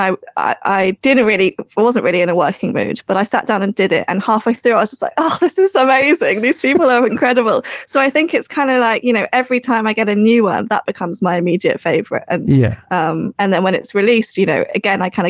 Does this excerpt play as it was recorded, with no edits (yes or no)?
yes